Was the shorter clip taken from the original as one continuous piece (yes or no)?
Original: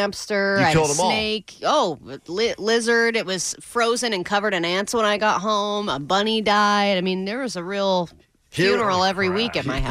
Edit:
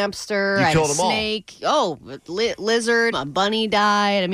no